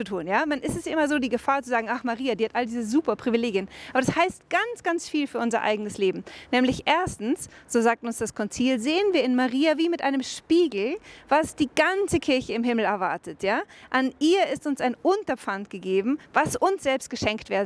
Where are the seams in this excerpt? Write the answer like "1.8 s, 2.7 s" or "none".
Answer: none